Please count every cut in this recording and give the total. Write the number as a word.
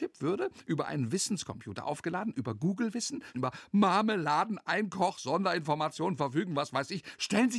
one